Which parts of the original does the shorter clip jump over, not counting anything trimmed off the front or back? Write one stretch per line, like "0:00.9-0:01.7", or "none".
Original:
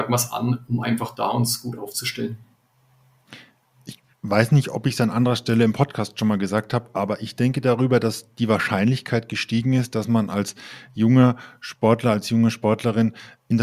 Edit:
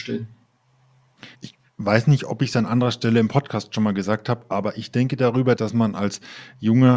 0:03.4-0:03.8
0:08.0-0:09.9